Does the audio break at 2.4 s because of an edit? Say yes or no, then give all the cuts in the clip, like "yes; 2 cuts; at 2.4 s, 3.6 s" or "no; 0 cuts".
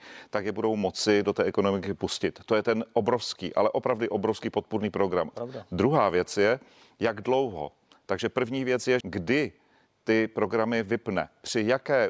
no; 2 cuts; at 5.3 s, 9.0 s